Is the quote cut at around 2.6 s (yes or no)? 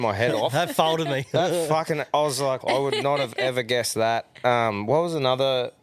yes